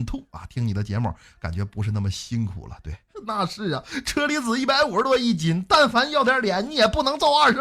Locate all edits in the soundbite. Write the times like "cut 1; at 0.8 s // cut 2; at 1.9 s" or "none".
cut 1; at 3.1 s